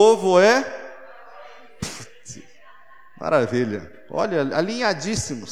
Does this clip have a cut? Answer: no; 0 cuts

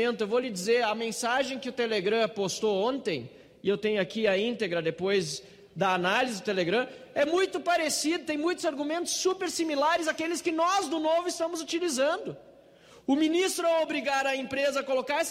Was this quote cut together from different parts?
no; 0 cuts

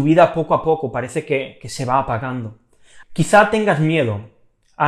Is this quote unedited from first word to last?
no; 1 cut; at 3.0 s

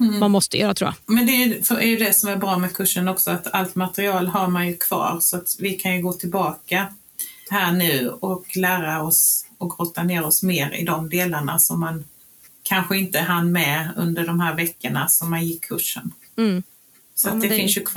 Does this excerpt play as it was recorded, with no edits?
no; 1 cut; at 1.0 s

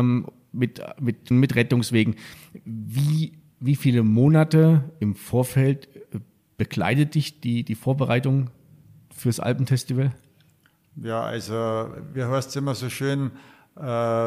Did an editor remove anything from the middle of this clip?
yes; 1 cut; at 1.3 s

